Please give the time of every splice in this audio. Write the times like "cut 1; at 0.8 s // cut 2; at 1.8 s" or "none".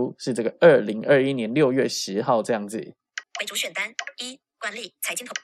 cut 1; at 3.2 s